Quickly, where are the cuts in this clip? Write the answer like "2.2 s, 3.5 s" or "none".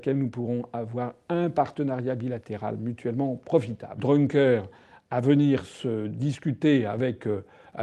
4.0 s